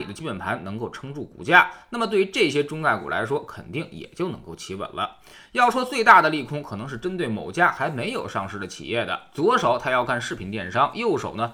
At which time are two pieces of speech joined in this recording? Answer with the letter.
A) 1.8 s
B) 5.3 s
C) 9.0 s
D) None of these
D